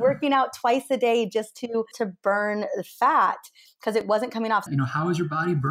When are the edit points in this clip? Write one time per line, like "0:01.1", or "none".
0:01.9
0:04.7